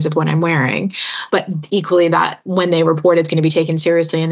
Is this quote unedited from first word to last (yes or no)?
yes